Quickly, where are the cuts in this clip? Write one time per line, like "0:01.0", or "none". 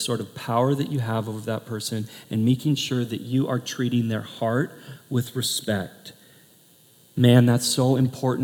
none

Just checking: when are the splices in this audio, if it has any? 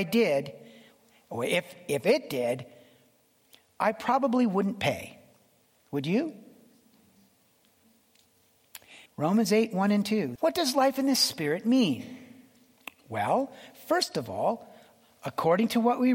0:09.1
0:10.4

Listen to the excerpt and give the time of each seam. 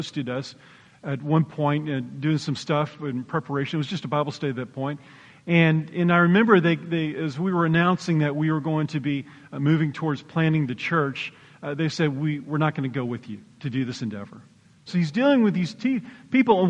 0:14.9

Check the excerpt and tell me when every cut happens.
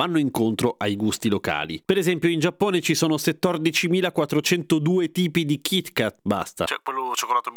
0:06.2

